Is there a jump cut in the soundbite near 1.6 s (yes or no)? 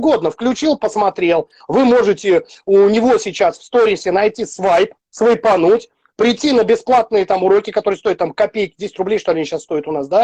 yes